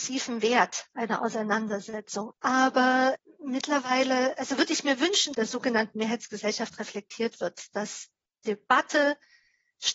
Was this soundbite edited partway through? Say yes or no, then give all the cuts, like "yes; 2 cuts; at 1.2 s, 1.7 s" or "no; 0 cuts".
yes; 2 cuts; at 2.3 s, 5.3 s